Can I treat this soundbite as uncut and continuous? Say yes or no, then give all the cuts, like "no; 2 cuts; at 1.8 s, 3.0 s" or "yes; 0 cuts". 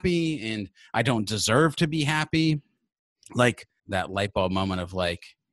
no; 1 cut; at 3.8 s